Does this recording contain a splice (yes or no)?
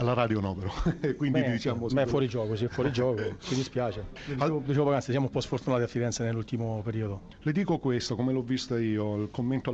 no